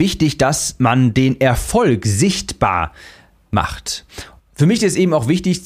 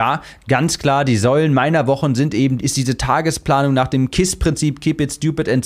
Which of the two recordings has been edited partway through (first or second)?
first